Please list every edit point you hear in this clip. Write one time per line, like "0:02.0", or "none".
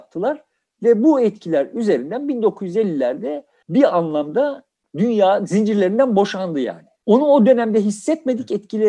0:07.0